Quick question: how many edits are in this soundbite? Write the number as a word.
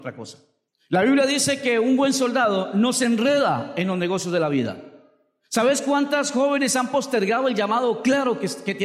zero